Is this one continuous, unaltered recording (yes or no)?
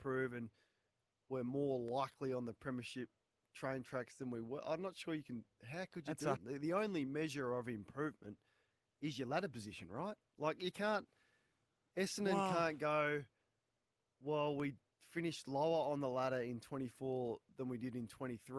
no